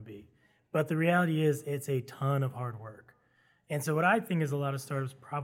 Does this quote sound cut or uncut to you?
uncut